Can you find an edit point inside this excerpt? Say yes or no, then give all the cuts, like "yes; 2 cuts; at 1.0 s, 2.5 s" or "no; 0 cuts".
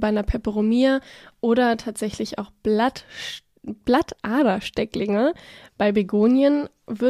no; 0 cuts